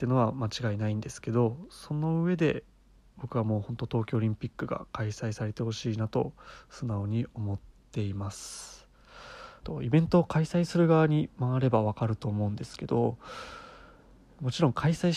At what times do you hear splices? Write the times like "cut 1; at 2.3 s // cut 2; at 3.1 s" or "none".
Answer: cut 1; at 9.6 s